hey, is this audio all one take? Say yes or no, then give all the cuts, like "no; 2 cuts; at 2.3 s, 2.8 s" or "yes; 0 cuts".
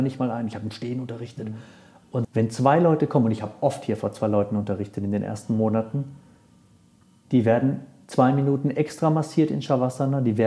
no; 1 cut; at 2.2 s